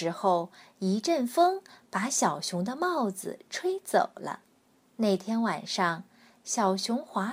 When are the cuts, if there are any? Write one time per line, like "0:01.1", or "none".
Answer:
0:04.8